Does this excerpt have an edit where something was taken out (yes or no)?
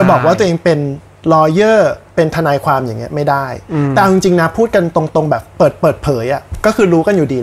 yes